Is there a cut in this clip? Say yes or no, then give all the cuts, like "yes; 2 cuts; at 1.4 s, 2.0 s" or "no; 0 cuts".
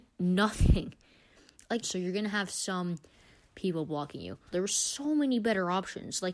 yes; 2 cuts; at 1.8 s, 4.5 s